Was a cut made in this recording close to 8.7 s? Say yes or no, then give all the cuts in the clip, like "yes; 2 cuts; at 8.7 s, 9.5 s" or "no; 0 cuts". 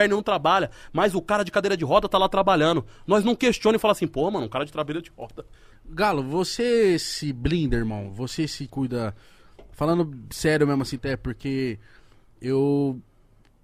yes; 3 cuts; at 5.7 s, 8.7 s, 11.0 s